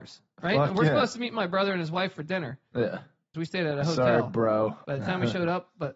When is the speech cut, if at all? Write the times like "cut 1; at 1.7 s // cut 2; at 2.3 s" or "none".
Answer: cut 1; at 3.3 s // cut 2; at 4.8 s

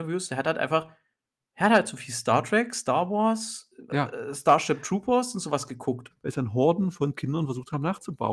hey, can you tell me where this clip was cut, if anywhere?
cut 1; at 3.9 s // cut 2; at 6.1 s

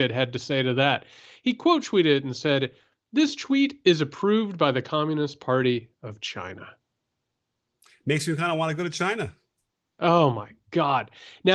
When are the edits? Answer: none

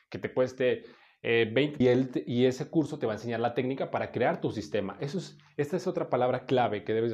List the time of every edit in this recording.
cut 1; at 1.8 s

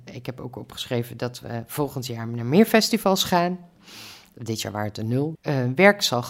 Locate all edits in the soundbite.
cut 1; at 5.3 s

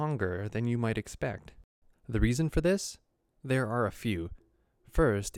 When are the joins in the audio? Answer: none

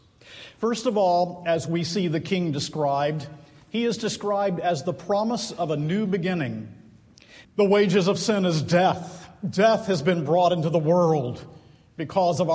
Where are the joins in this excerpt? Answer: cut 1; at 7.4 s

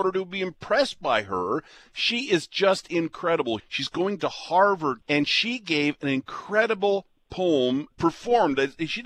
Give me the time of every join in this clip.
cut 1; at 3.6 s // cut 2; at 5.0 s // cut 3; at 7.9 s

